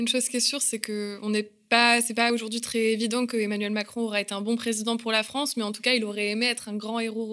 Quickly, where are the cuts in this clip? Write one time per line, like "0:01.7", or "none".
none